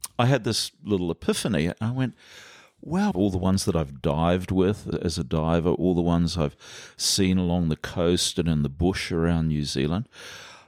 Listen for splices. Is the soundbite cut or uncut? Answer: cut